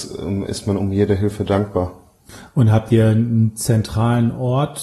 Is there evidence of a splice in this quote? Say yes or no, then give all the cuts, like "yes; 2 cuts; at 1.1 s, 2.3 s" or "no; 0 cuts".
no; 0 cuts